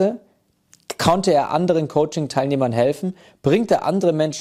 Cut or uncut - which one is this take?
uncut